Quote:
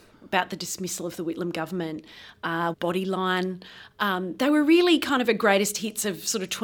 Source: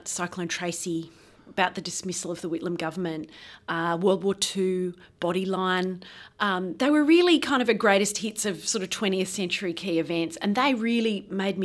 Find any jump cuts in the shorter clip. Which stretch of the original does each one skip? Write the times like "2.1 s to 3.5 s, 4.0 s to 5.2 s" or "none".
4.0 s to 5.1 s